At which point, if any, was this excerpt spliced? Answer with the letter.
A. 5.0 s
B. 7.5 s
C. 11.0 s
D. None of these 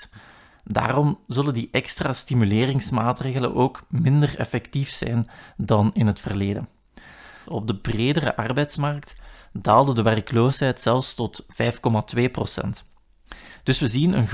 B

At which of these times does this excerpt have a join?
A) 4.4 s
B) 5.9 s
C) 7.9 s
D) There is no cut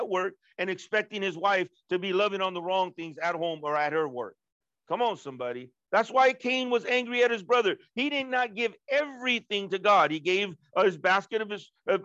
B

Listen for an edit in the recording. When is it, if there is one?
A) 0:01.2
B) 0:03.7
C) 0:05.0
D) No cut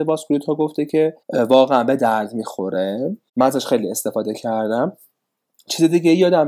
A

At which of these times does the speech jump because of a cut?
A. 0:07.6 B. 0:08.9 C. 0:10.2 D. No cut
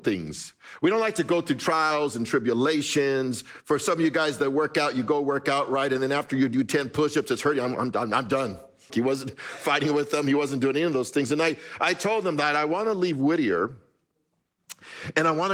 B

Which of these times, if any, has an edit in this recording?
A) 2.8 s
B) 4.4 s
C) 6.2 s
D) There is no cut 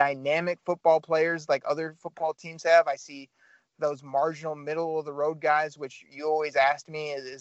D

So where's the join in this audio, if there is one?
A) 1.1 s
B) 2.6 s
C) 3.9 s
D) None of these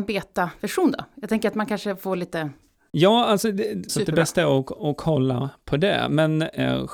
C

